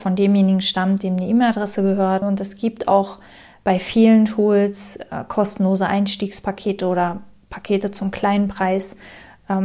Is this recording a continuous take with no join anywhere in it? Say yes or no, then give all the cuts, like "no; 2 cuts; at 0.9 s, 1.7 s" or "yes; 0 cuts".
no; 1 cut; at 2.2 s